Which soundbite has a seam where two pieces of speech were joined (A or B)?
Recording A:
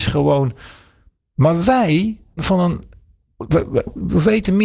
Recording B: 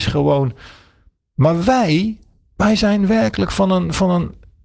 A